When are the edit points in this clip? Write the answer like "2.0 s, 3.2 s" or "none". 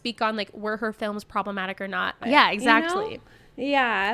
2.2 s